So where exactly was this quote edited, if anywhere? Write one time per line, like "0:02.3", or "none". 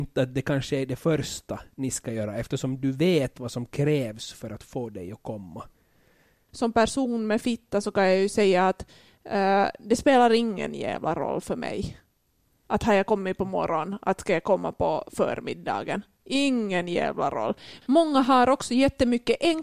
none